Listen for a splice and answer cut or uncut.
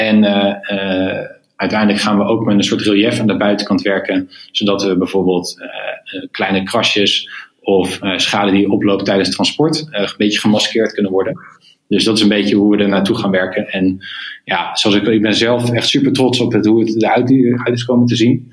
uncut